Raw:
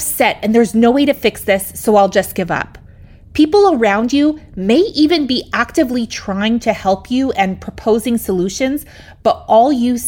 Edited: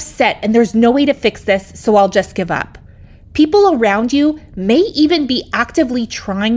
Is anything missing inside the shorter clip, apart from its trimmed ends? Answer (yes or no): no